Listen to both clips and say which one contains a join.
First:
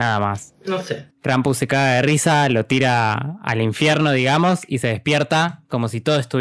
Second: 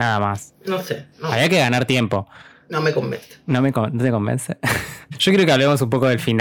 first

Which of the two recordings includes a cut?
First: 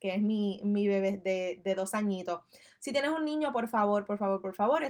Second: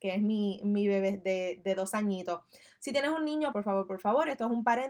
second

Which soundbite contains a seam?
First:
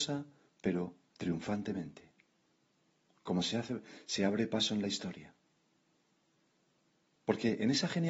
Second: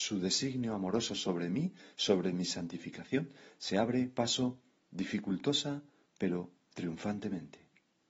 first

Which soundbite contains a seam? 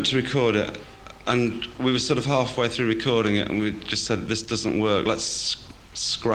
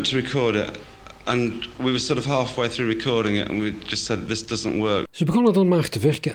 second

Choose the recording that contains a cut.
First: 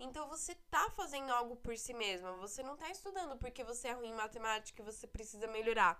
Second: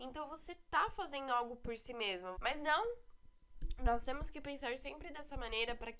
second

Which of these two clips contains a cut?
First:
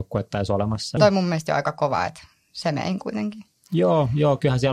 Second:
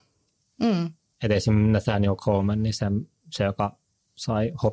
first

